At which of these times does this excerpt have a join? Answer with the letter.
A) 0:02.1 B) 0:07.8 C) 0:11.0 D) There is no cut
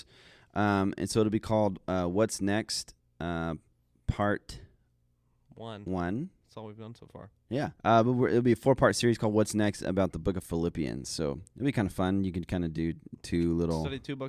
B